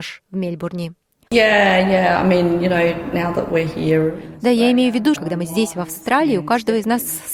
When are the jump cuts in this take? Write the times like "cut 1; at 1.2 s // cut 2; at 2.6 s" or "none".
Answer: cut 1; at 1.3 s // cut 2; at 5.1 s